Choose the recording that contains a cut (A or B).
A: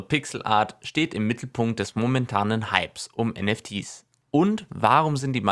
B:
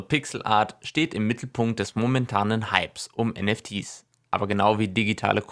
A